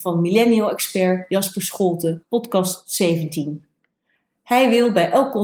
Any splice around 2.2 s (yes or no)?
yes